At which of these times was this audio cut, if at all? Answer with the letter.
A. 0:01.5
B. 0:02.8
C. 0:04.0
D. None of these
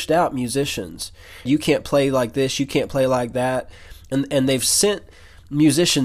A